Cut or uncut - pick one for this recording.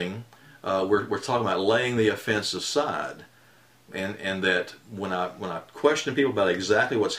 uncut